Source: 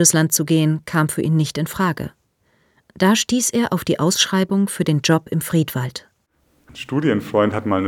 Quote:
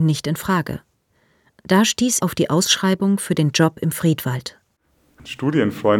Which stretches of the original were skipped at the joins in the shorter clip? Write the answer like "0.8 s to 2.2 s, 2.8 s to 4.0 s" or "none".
3.5 s to 3.7 s